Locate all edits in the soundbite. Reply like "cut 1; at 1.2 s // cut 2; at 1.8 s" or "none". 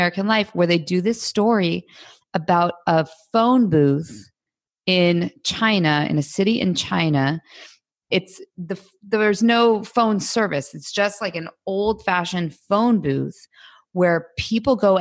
none